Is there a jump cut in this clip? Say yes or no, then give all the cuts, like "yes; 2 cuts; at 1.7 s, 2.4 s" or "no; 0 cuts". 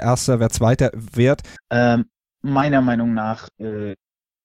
yes; 1 cut; at 1.6 s